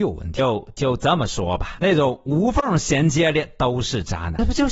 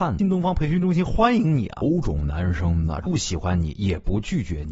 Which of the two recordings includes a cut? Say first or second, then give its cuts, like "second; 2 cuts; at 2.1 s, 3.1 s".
second; 1 cut; at 3.0 s